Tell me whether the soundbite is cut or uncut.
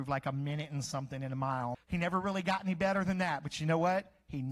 cut